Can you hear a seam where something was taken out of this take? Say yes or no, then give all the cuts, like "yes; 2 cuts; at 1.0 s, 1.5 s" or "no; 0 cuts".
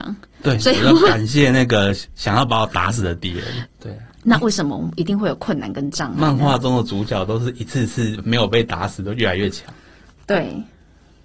yes; 1 cut; at 3.7 s